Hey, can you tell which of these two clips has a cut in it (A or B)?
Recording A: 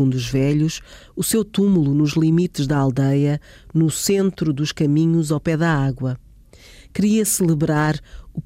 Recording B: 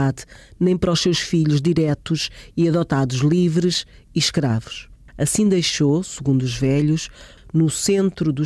B